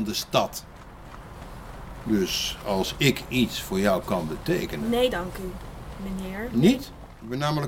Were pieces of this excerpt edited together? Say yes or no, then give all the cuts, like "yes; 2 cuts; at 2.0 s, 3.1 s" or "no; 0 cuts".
no; 0 cuts